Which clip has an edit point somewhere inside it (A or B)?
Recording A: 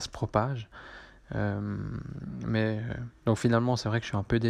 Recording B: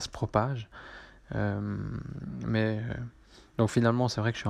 A